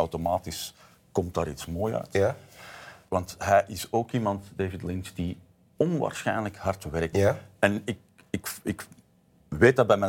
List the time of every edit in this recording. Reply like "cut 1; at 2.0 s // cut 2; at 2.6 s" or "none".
cut 1; at 3.1 s // cut 2; at 7.1 s